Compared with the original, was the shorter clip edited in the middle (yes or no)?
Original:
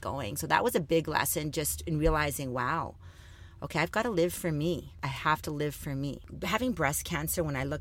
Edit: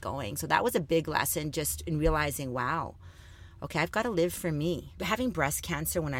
yes